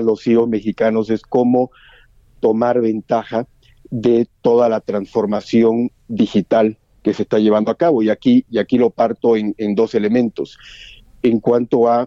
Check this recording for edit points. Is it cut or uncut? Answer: uncut